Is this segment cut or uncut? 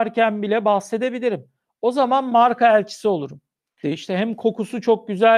cut